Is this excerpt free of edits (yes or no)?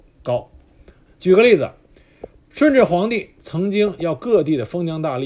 no